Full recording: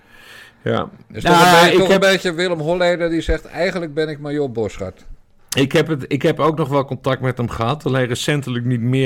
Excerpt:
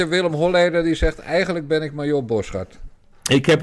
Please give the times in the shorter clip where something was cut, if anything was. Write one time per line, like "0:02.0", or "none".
none